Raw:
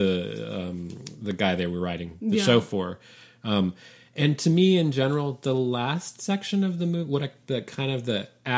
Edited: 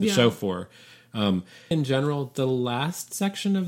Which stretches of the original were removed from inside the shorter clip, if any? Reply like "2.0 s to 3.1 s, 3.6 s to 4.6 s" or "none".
4.0 s to 4.8 s